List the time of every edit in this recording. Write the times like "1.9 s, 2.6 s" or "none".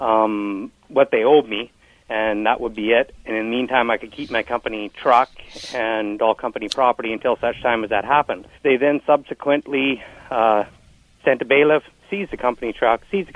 8.6 s